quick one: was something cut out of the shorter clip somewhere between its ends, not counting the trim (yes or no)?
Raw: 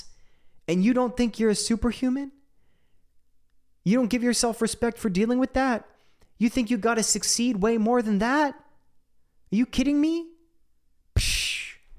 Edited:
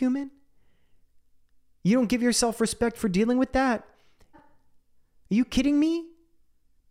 yes